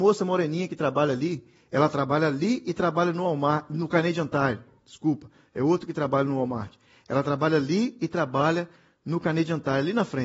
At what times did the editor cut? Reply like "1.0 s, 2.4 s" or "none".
none